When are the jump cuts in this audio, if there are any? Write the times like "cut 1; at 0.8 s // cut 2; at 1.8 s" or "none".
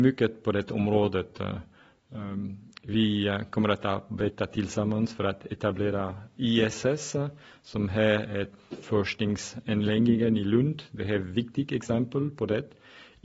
none